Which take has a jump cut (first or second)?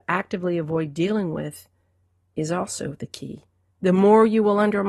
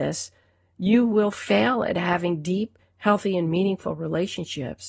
first